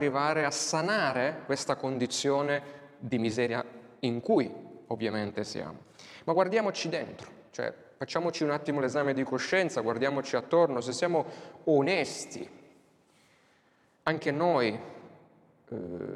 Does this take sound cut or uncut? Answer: uncut